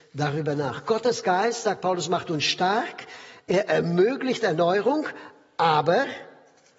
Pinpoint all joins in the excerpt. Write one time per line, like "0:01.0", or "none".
none